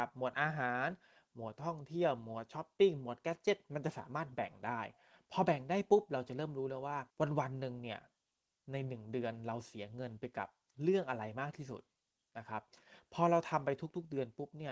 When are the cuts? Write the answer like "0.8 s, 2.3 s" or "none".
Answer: 7.1 s